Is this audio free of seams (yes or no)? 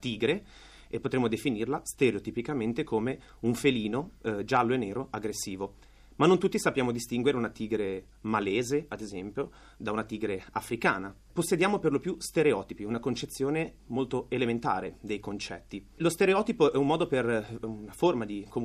yes